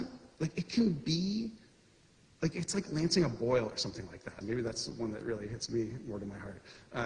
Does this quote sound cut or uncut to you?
cut